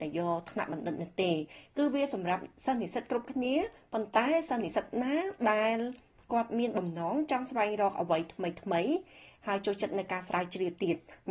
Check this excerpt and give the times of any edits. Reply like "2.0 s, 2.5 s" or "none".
none